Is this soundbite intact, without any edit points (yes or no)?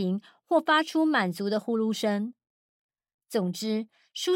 yes